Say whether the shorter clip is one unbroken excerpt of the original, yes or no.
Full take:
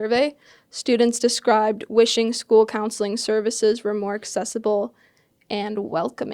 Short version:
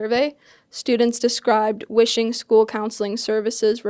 yes